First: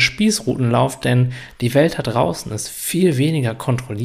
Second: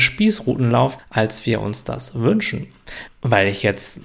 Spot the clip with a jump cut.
second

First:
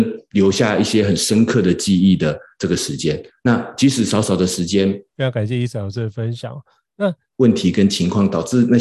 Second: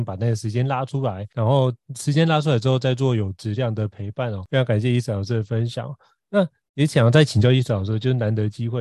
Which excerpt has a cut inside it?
first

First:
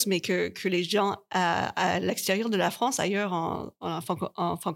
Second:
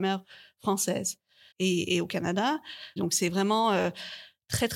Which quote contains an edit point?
second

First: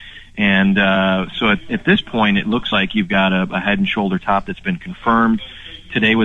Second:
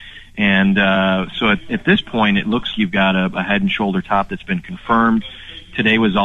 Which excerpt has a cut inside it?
second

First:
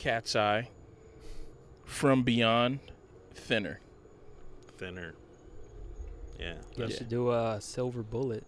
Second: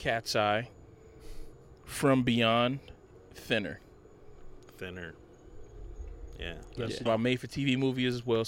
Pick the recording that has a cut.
second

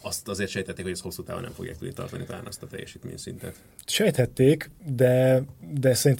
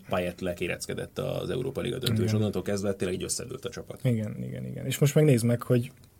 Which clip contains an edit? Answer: second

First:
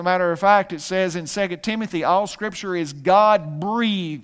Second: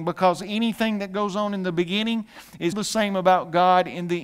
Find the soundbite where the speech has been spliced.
second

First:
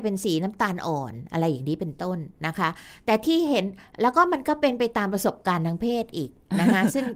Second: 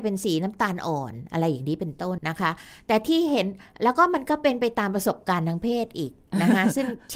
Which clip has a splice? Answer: second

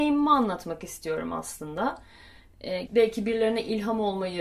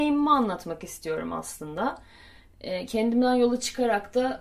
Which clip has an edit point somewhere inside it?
first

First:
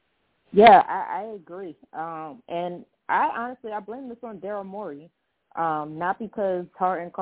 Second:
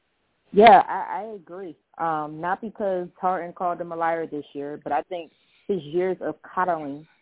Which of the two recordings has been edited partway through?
second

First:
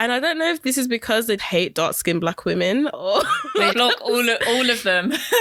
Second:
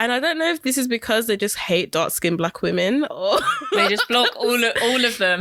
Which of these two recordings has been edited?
first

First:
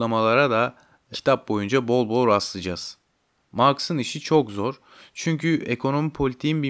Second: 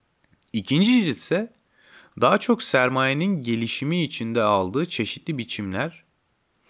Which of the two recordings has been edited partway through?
first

